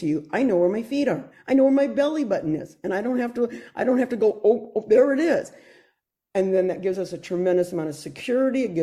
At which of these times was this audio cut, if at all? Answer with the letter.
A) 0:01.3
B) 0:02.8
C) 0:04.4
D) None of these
A